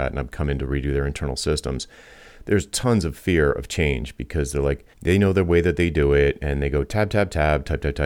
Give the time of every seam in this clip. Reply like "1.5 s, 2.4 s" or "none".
4.9 s